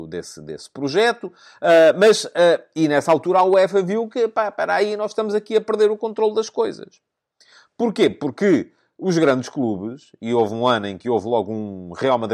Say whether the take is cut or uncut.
uncut